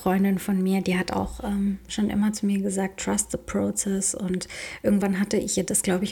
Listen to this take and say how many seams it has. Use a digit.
0